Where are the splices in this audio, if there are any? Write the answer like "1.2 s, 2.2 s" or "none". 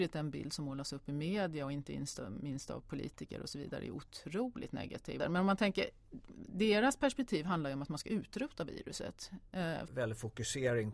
5.2 s, 9.9 s